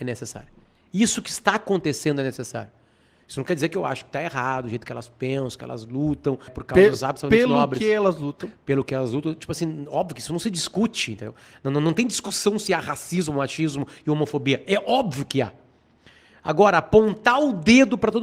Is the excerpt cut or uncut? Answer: cut